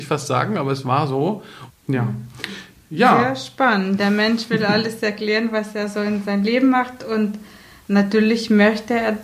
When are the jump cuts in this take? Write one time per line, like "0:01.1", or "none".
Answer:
0:01.7